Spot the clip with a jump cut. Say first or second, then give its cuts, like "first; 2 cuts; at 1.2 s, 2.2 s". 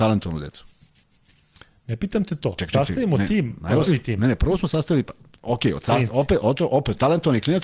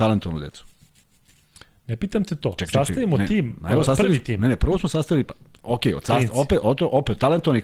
first; 1 cut; at 3.9 s